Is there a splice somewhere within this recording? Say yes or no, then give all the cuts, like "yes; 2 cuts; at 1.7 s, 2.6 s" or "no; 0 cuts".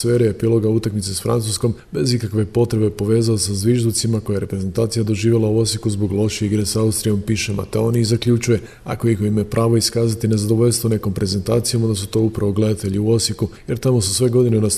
no; 0 cuts